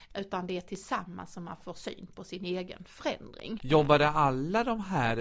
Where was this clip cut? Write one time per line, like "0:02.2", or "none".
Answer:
0:03.6

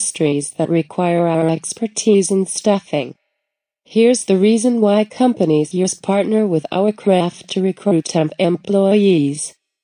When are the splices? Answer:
0:05.7

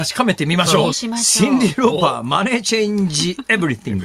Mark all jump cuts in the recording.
0:00.9

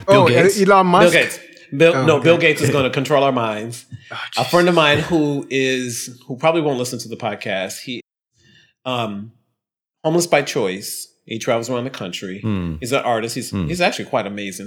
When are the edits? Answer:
none

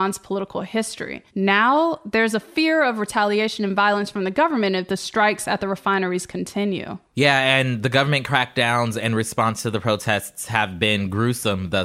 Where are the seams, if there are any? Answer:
0:01.3

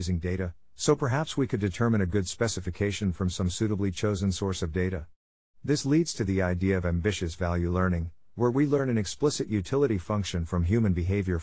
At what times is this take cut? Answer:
none

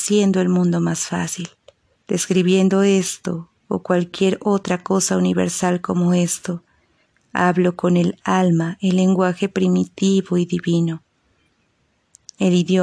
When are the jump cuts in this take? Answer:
0:02.0

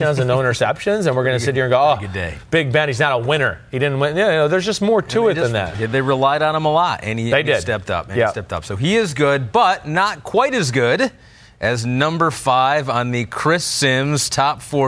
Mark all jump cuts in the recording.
none

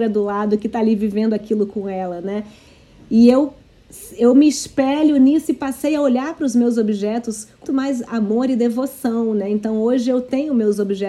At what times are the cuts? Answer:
0:07.6

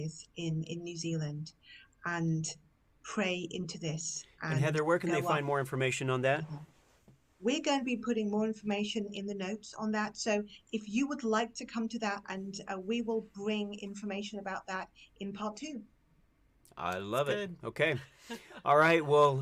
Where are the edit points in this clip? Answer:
0:12.2

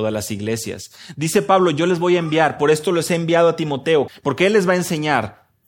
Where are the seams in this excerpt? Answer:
0:04.1

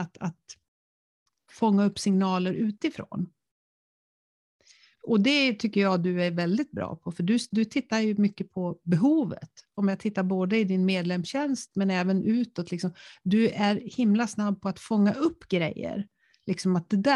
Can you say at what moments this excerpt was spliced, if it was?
none

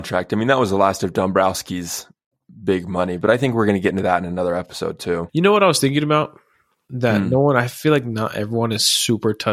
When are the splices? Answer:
0:05.3

